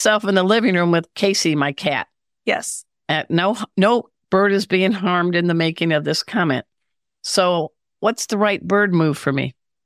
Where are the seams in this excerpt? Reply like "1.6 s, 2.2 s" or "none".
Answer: none